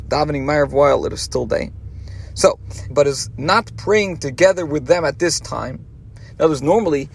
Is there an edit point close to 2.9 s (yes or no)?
yes